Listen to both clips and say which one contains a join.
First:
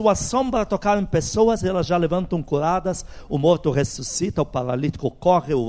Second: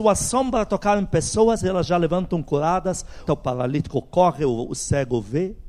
second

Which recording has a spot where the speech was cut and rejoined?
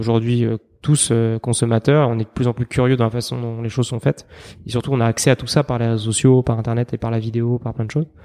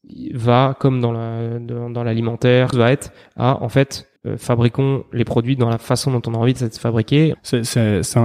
second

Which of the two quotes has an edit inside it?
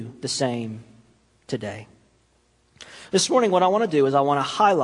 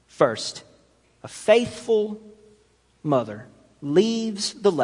second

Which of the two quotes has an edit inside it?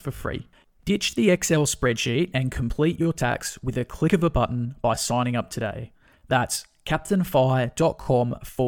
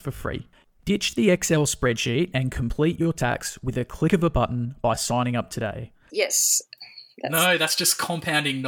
second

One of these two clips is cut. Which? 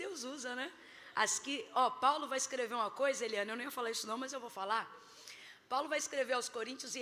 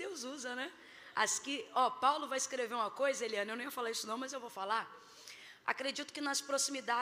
second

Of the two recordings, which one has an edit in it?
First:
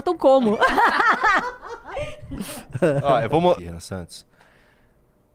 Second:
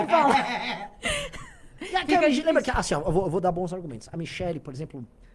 first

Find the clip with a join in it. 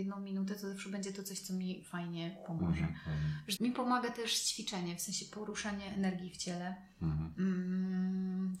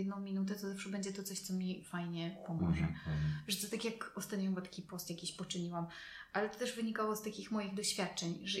first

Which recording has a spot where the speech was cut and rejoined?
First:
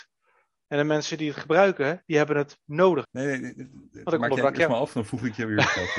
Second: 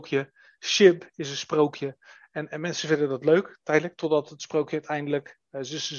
first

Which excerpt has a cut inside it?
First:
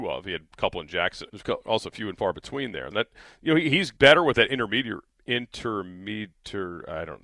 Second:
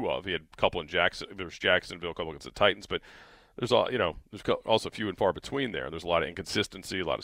first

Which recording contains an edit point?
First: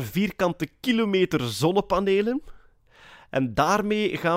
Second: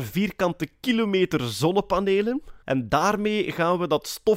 second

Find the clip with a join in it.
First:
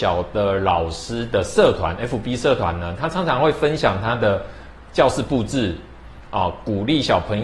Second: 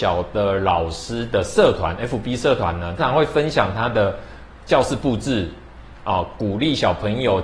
second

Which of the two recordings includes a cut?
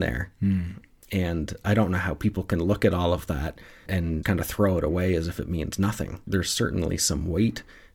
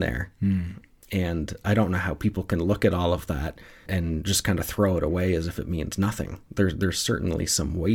first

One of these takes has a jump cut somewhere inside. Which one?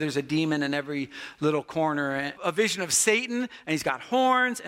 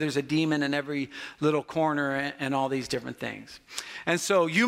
first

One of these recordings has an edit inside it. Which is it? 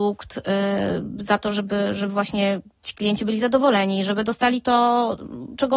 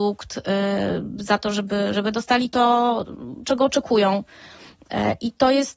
second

